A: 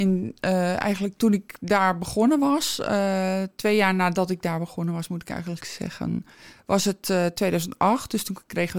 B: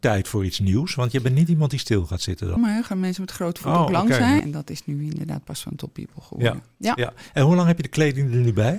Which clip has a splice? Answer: B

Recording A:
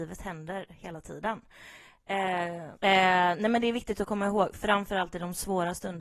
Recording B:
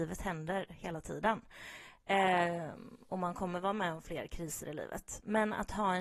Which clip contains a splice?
A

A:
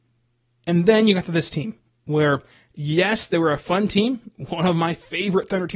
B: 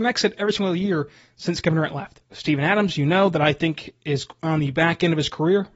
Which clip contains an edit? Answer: B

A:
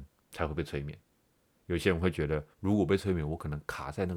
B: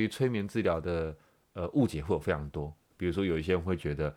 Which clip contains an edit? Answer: A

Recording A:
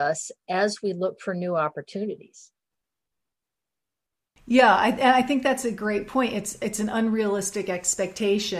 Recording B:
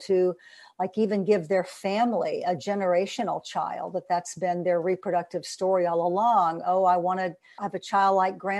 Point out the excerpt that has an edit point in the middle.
B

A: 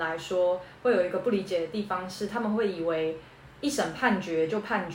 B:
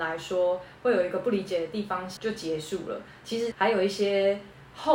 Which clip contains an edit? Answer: B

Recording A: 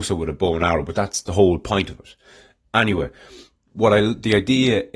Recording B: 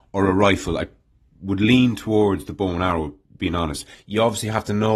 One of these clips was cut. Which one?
B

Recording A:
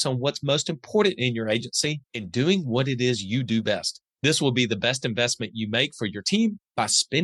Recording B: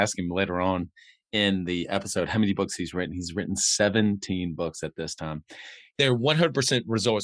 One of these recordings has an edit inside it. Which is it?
B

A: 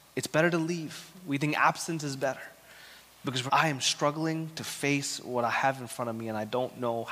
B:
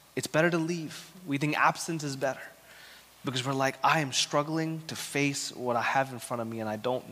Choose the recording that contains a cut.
A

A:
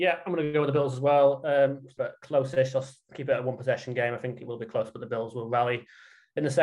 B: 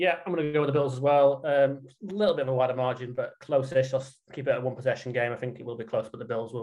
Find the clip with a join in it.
A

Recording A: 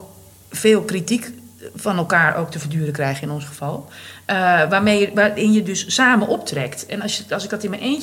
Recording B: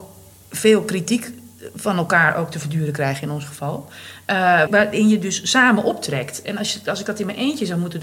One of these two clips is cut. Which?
B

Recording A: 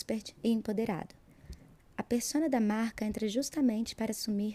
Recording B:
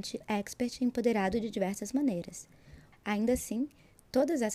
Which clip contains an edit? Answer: B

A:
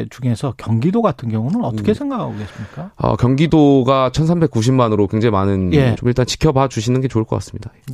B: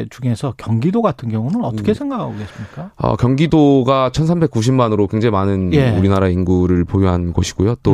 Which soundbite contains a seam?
A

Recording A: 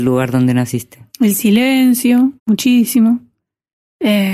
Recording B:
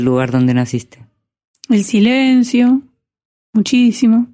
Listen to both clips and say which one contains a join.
A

